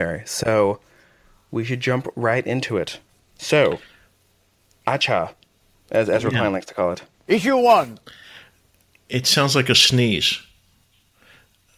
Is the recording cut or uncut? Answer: uncut